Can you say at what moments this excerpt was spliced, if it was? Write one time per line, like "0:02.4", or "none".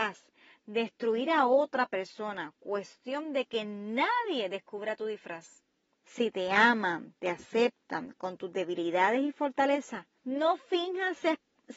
0:06.0

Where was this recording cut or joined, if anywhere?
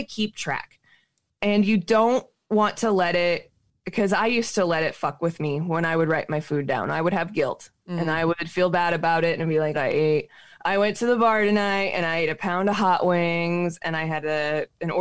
0:09.7

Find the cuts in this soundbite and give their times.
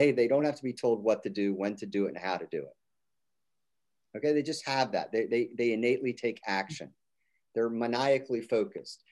none

